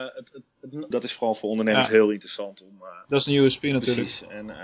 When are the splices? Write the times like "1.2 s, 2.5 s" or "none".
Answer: 0.9 s